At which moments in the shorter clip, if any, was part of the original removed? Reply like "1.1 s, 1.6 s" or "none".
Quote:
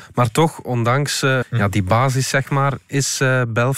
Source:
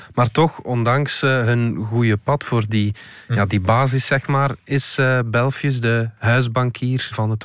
1.4 s

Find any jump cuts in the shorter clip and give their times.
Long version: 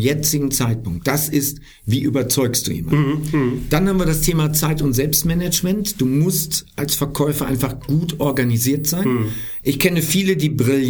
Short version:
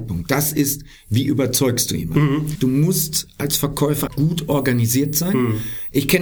2.6 s, 4.1 s

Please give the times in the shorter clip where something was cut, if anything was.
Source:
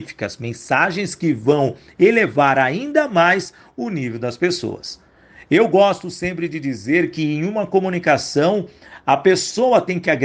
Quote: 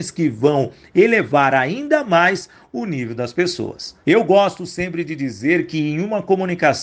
4.0 s

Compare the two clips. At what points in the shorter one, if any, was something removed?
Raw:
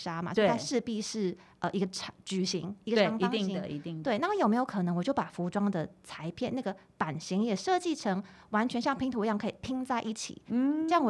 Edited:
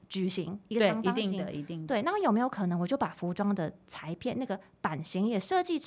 none

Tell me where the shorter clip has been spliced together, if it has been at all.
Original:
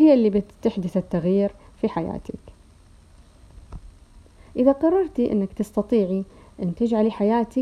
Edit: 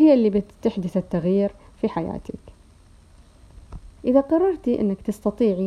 4.0 s

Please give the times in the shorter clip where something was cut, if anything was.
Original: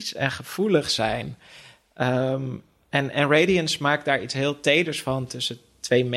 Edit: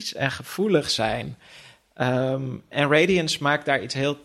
2.7 s

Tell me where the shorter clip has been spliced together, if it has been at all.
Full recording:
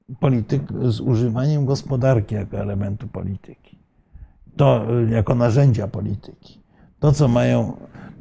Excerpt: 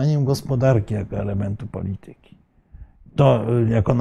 none

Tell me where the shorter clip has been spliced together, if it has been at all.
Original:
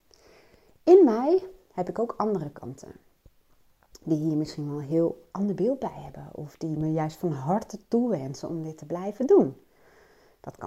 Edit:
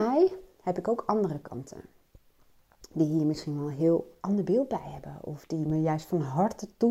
none

